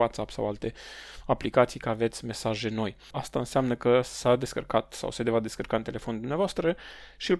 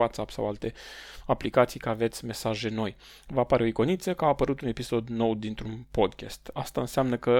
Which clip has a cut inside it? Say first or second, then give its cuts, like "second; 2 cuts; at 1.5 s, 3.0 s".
first; 1 cut; at 3.1 s